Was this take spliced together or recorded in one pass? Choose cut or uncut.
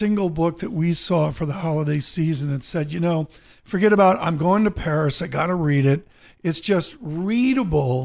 uncut